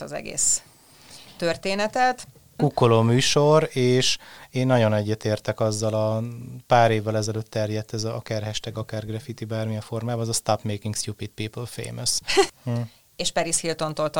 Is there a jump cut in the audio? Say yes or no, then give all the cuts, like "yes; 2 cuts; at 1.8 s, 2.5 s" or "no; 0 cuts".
yes; 2 cuts; at 2.6 s, 12.5 s